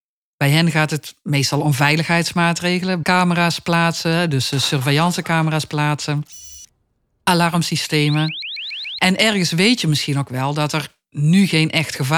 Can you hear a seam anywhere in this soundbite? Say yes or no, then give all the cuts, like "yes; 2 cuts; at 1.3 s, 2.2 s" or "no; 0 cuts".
yes; 2 cuts; at 3.0 s, 9.0 s